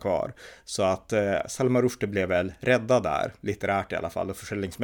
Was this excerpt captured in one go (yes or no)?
yes